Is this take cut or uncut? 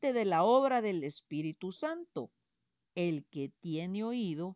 cut